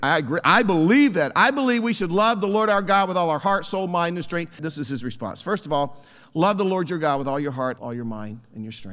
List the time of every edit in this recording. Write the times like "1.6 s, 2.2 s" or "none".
4.6 s, 7.8 s